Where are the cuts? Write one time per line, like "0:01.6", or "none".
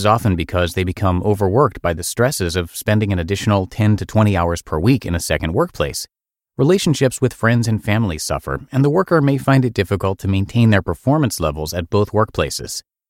none